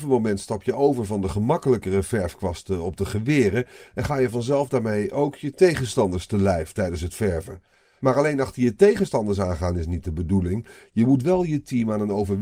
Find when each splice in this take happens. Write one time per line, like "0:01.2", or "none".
none

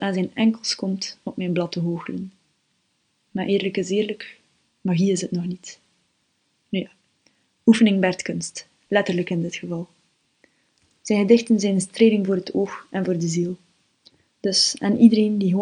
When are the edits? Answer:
none

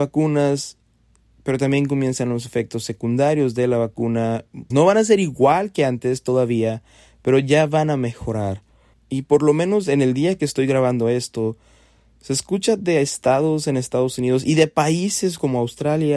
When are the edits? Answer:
0:04.7
0:08.9

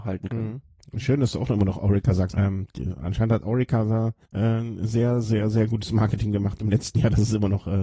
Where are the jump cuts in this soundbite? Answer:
0:02.3
0:04.2

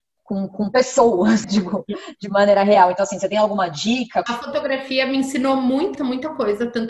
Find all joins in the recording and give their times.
0:01.4
0:04.3
0:06.0

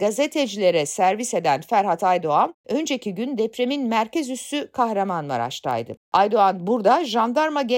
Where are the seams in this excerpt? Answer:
none

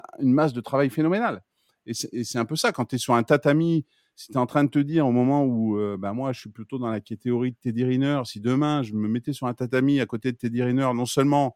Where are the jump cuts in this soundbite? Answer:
none

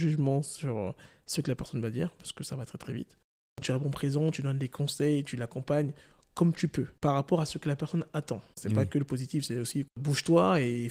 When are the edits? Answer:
0:08.6

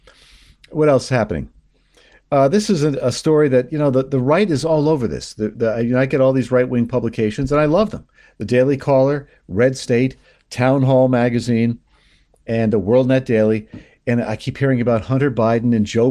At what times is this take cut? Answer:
none

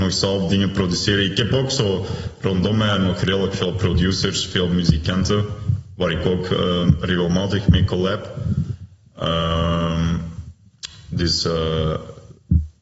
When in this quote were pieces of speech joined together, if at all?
none

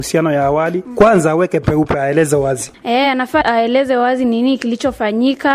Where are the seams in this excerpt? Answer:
none

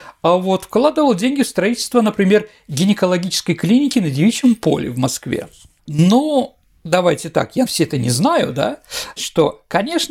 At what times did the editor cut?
0:05.8
0:07.7
0:09.2

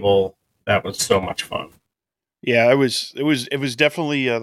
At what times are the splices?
0:01.0

